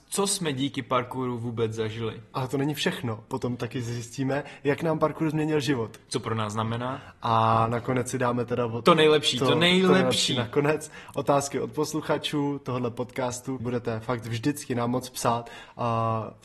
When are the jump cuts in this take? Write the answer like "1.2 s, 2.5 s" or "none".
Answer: 13.6 s